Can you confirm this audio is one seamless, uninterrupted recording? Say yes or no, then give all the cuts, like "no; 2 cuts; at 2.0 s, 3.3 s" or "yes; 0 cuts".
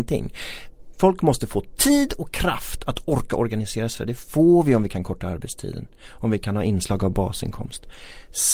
yes; 0 cuts